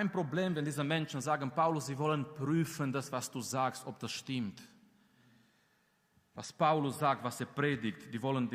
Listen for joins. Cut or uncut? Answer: uncut